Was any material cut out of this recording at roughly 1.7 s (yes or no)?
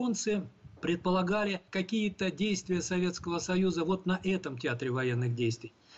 yes